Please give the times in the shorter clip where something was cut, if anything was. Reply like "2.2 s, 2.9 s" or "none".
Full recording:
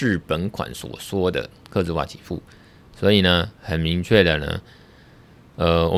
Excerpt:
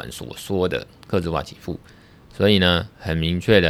none